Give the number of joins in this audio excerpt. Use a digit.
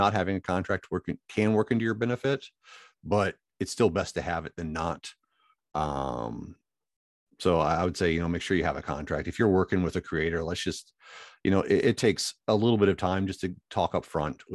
0